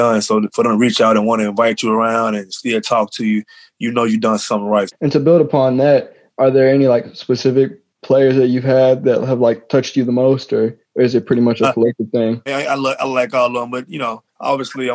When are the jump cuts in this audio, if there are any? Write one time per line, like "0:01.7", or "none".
0:04.9
0:12.5